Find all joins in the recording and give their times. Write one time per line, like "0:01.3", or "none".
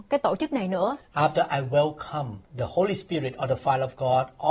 0:01.0
0:02.4